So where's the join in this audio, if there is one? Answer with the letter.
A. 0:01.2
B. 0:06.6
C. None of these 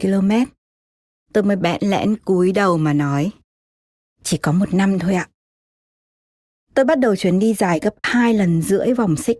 A